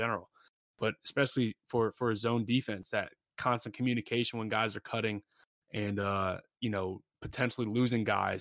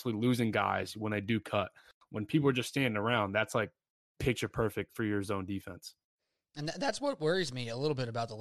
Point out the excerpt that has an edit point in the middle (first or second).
second